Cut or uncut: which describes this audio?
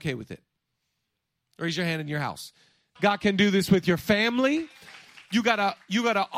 cut